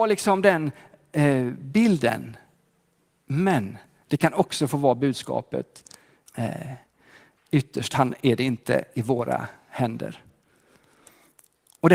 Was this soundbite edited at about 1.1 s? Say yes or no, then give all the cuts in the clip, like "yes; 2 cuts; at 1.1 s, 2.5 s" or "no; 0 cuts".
no; 1 cut; at 6.3 s